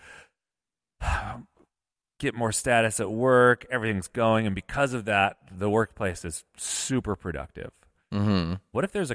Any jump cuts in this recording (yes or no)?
no